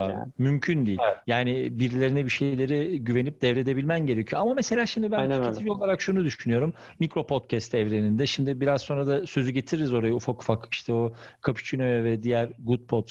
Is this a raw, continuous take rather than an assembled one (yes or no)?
yes